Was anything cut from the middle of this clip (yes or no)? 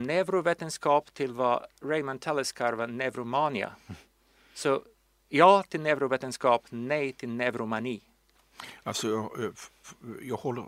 no